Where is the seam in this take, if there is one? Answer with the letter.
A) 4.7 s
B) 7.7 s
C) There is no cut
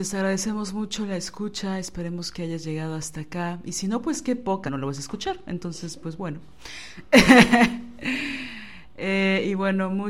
A